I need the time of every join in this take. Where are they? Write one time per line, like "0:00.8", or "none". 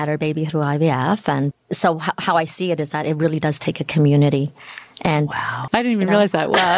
0:01.5
0:05.7